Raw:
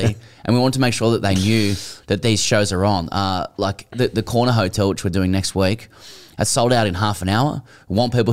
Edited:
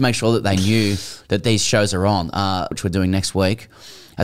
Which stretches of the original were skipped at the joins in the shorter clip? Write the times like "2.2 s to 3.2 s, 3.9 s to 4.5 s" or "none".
3.5 s to 4.9 s

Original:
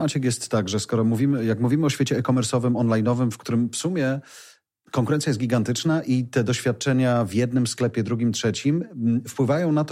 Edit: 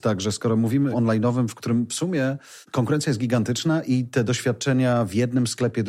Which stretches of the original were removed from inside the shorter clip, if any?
1.4 s to 2.7 s, 4.4 s to 4.8 s

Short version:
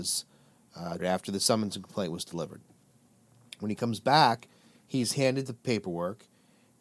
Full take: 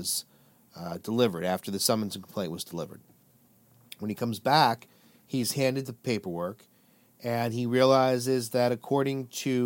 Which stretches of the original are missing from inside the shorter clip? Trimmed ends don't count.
1.0 s to 1.4 s

